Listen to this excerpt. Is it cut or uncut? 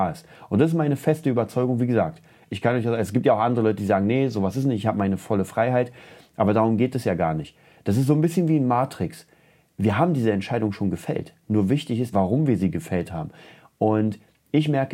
cut